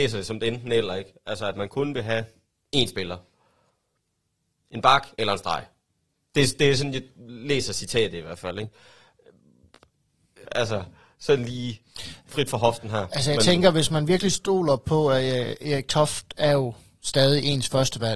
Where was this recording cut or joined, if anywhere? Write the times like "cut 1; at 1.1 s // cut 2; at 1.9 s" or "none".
cut 1; at 5.1 s // cut 2; at 10.4 s

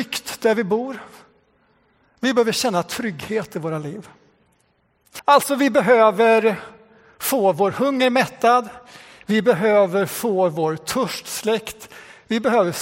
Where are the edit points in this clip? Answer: cut 1; at 5.2 s

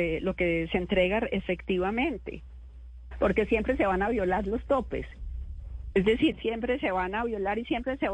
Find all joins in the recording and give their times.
cut 1; at 3.1 s // cut 2; at 6.3 s

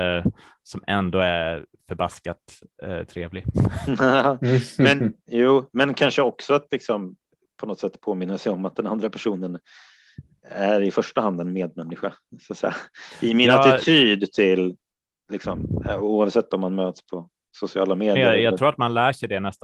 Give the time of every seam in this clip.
none

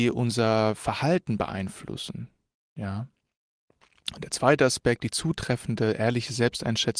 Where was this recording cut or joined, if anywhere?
none

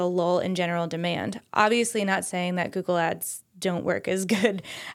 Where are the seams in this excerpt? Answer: none

